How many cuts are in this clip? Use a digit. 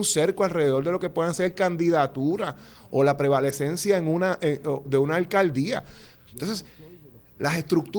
2